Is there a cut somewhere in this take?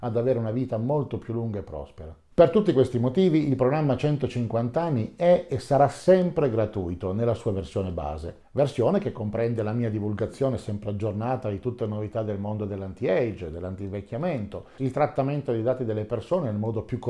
yes; 1 cut; at 14.8 s

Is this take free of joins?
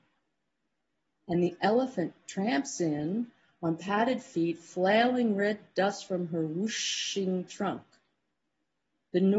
no; 1 cut; at 1.1 s

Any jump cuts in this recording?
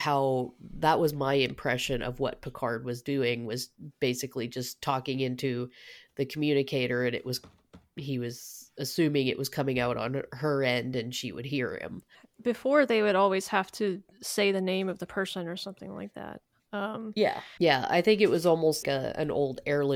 yes; 2 cuts; at 17.6 s, 18.8 s

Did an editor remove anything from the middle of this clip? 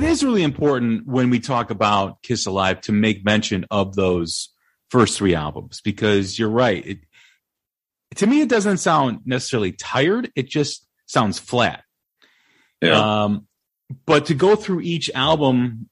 no; 0 cuts

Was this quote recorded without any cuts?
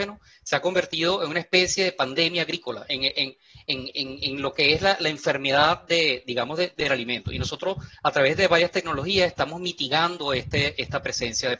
yes; 0 cuts

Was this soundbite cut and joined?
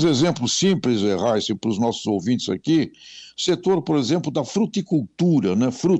no; 0 cuts

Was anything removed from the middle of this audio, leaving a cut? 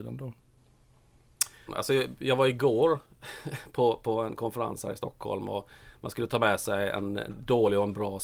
yes; 1 cut; at 1.7 s

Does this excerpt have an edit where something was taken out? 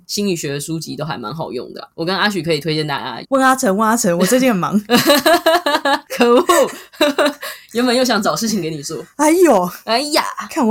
yes; 1 cut; at 3.2 s

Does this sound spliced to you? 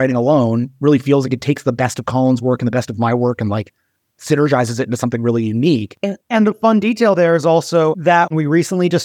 no; 0 cuts

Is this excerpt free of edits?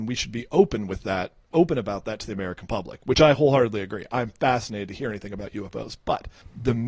yes; 0 cuts

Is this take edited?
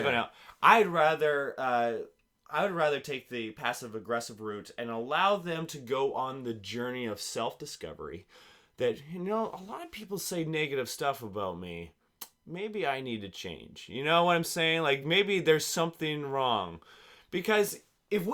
no; 0 cuts

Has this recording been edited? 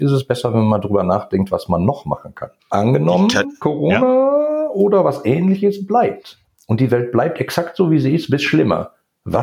yes; 1 cut; at 2.6 s

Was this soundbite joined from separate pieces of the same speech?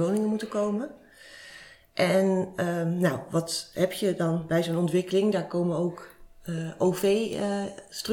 no; 0 cuts

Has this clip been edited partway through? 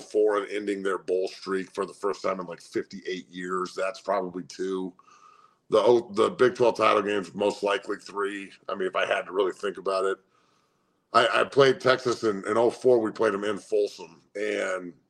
yes; 1 cut; at 6.1 s

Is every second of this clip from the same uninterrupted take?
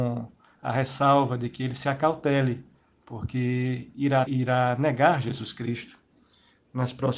no; 1 cut; at 4.3 s

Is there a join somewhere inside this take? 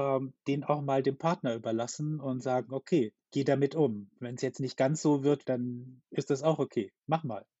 yes; 2 cuts; at 3.2 s, 5.4 s

